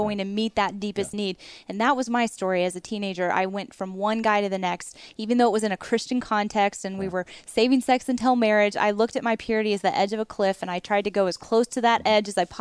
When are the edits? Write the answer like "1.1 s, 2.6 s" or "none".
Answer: none